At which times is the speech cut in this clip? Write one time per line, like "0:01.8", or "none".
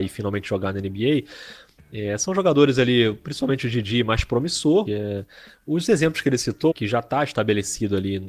0:04.9
0:06.7